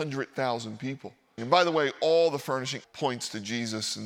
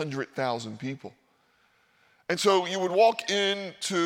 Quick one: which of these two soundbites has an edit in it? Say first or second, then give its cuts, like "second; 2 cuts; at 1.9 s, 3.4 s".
first; 2 cuts; at 1.4 s, 2.8 s